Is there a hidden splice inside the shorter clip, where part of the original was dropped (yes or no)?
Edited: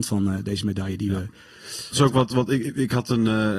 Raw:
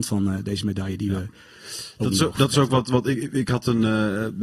yes